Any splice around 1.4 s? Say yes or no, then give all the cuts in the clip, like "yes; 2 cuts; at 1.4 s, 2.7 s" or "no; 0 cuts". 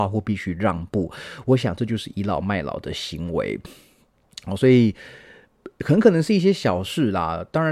no; 0 cuts